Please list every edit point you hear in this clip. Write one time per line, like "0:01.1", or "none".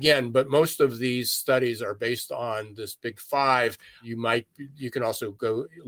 none